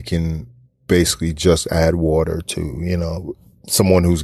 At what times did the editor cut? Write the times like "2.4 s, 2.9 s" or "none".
none